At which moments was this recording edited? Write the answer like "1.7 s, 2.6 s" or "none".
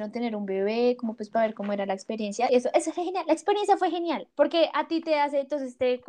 2.5 s, 4.3 s